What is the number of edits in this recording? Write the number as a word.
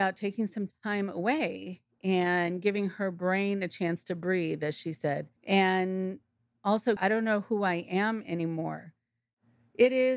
two